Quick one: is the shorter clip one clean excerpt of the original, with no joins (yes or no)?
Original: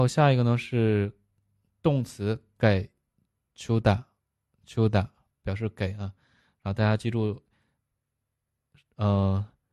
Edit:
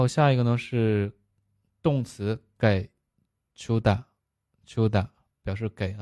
yes